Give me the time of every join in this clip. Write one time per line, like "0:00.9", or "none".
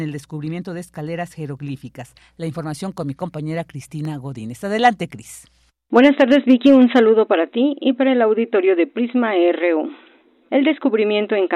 none

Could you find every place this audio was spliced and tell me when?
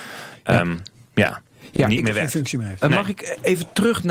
none

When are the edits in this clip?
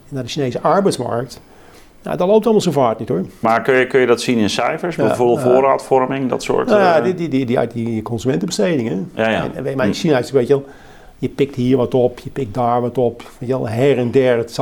0:03.4

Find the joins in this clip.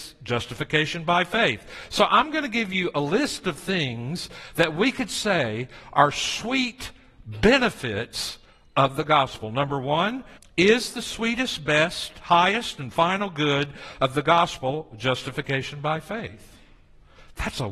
0:10.4

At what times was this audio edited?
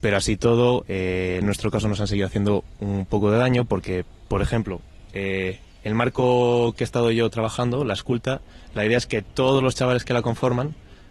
0:01.4

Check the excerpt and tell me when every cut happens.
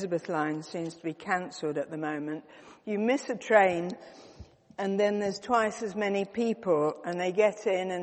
none

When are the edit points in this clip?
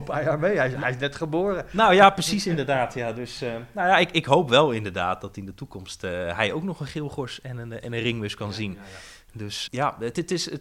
0:09.7

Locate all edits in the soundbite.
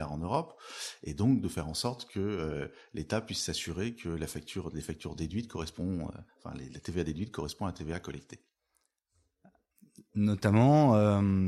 none

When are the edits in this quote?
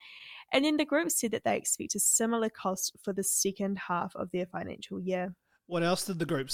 none

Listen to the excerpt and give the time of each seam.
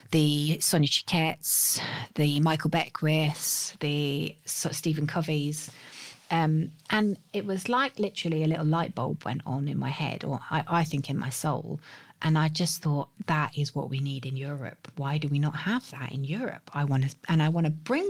none

